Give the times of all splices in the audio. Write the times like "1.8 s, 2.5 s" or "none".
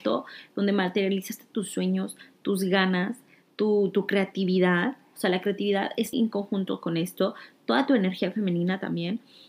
6.1 s